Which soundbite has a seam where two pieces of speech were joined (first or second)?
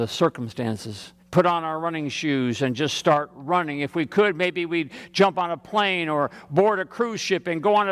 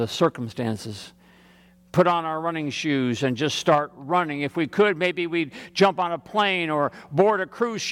first